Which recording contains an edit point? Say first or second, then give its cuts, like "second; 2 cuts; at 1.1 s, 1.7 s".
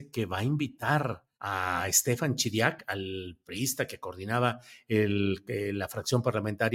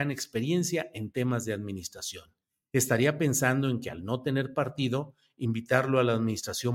first; 1 cut; at 1.3 s